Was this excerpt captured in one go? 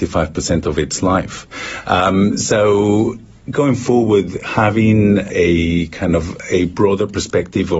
yes; 0 cuts

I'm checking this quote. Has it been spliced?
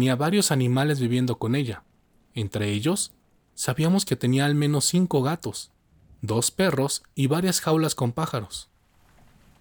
no; 0 cuts

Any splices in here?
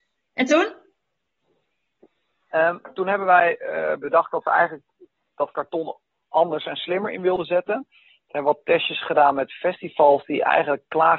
no; 0 cuts

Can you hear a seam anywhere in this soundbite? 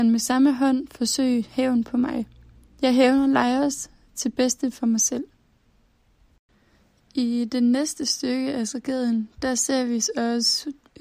no; 0 cuts

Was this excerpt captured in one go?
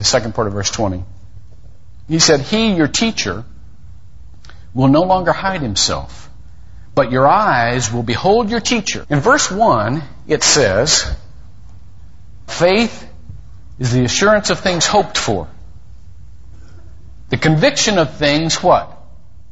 no; 2 cuts; at 9.0 s, 12.5 s

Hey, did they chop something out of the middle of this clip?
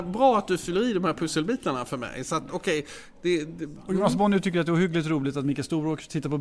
no; 0 cuts

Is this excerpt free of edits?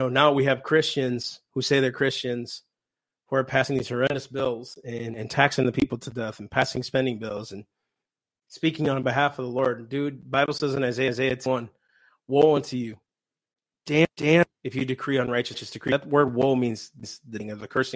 yes; 0 cuts

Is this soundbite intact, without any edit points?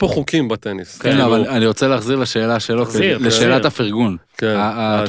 yes; 0 cuts

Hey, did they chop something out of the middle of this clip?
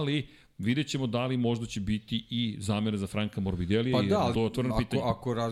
yes; 1 cut; at 4.3 s

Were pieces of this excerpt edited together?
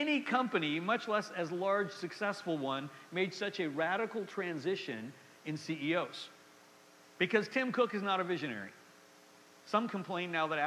no; 0 cuts

